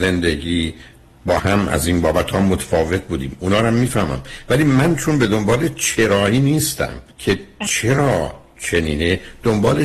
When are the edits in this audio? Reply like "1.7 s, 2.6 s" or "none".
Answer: 1.4 s, 7.1 s